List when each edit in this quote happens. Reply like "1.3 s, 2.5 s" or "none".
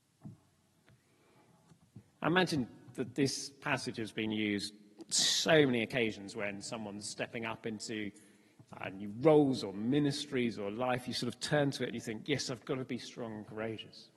none